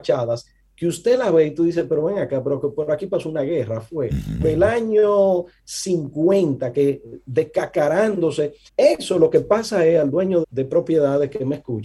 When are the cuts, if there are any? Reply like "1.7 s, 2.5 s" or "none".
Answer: 4.4 s, 8.7 s, 10.4 s

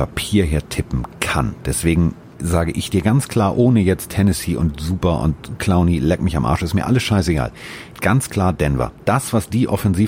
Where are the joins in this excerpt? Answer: 2.3 s, 8.0 s

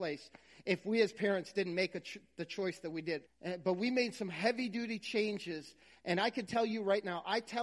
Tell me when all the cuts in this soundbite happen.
3.3 s

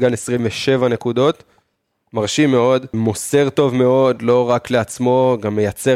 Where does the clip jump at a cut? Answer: 2.9 s

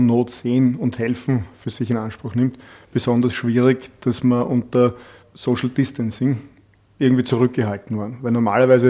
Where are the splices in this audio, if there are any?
none

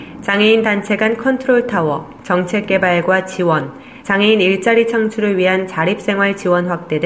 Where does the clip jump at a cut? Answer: 4.0 s

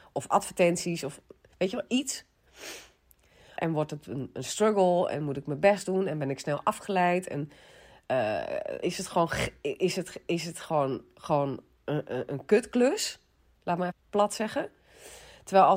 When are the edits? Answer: 3.6 s, 8.8 s, 13.9 s

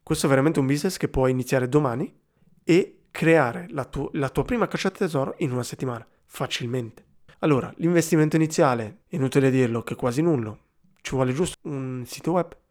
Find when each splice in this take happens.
7.3 s, 9.0 s, 11.5 s

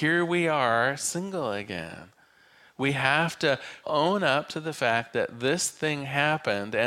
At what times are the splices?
3.8 s

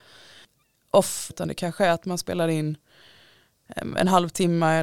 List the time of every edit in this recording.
1.3 s

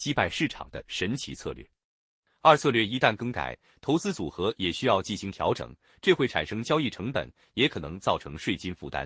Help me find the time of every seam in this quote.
none

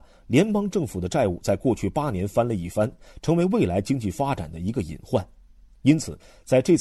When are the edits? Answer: none

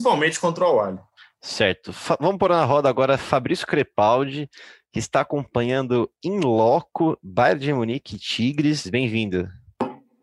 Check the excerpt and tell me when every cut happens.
8.8 s

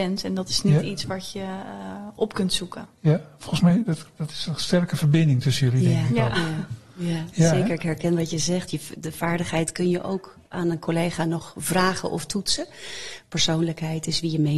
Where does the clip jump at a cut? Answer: 8.7 s

